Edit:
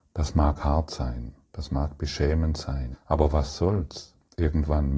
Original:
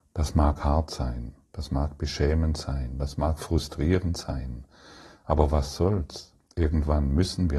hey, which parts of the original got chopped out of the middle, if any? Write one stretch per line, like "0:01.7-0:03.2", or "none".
0:02.9-0:05.1